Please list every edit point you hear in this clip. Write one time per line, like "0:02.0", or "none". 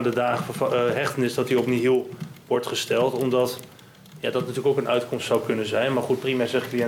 none